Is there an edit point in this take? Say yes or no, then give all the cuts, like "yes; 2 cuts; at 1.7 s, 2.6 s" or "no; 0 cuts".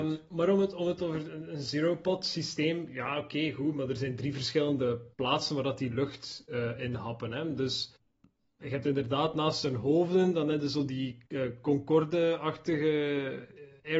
no; 0 cuts